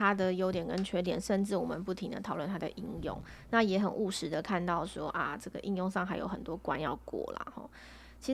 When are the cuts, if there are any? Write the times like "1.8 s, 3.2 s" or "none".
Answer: none